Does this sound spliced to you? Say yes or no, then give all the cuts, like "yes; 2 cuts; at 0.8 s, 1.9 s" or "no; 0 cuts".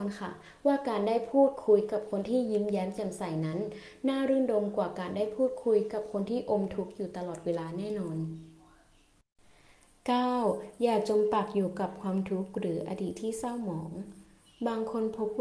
no; 0 cuts